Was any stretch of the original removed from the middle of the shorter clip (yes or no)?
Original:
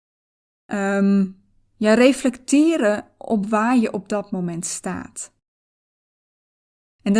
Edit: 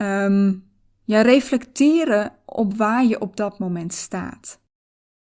no